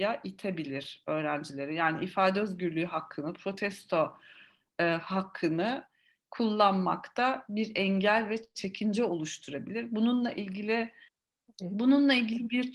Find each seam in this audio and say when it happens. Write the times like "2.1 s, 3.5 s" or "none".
none